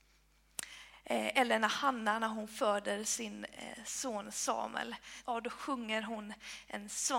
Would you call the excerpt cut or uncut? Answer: cut